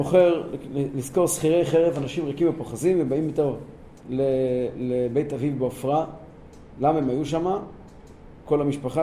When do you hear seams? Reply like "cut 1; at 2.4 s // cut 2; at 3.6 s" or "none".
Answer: cut 1; at 4.0 s

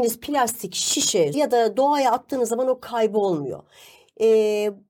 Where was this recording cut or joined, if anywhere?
cut 1; at 1.3 s

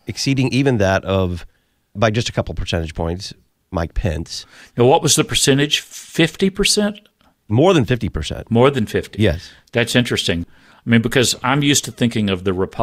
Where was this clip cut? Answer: none

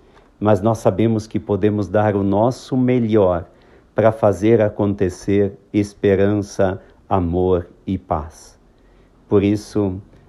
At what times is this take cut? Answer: none

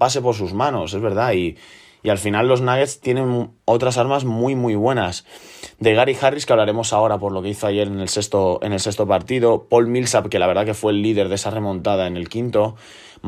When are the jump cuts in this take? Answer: none

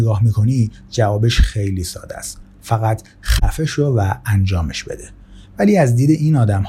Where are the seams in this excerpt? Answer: none

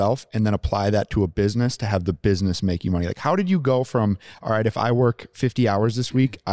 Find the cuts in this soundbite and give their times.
none

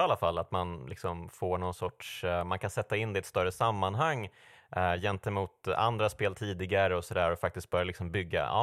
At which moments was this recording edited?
none

